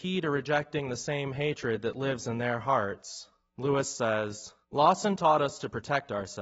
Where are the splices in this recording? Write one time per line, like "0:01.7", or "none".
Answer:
0:03.5
0:04.6